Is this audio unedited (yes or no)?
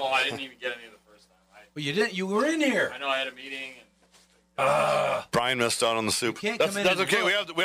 yes